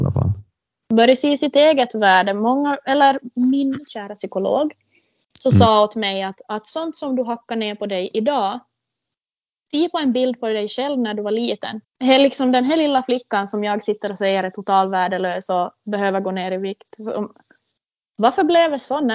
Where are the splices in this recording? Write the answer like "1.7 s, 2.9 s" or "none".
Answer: 11.8 s